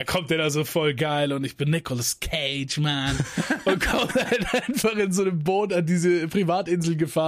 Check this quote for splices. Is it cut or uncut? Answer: uncut